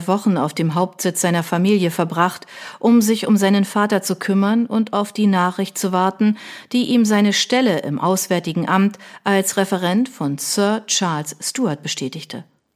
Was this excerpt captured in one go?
yes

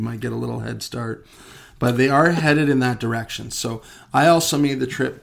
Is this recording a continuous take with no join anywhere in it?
yes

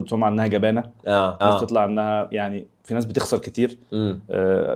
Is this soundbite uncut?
no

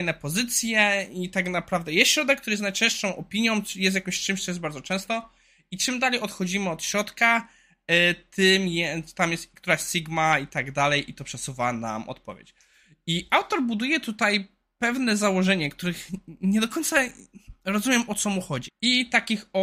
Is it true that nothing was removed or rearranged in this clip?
no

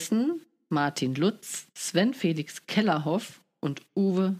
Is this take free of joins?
no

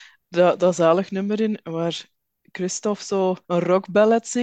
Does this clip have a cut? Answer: yes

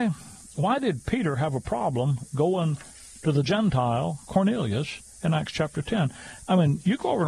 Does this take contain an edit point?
no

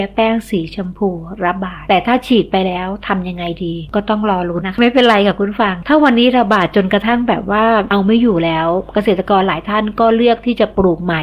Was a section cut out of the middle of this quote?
yes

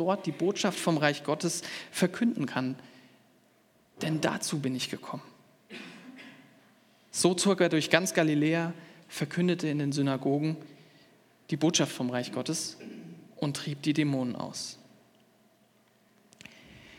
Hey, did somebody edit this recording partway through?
no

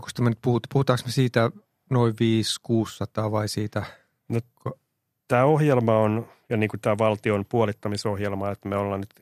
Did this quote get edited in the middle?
no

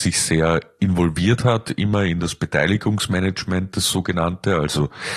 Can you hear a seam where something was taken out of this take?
no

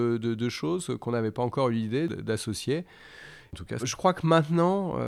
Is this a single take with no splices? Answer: no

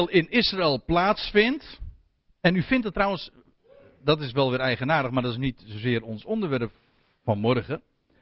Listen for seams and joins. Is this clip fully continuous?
yes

